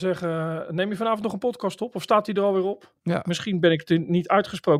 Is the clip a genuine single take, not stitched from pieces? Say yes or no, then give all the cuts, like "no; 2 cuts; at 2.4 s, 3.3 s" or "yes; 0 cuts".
no; 1 cut; at 3.0 s